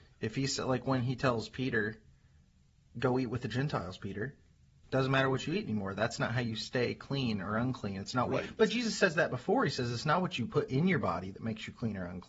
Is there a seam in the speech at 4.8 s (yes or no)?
yes